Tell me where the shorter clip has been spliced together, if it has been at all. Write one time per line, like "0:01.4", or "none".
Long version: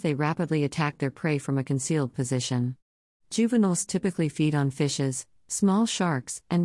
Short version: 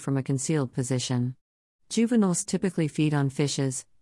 none